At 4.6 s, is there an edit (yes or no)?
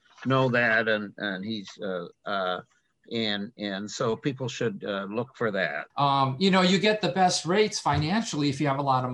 no